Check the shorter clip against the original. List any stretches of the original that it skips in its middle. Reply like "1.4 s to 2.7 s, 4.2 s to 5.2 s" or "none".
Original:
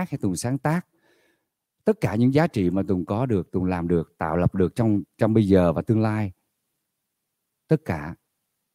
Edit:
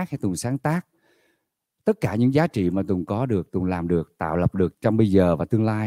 4.7 s to 5.1 s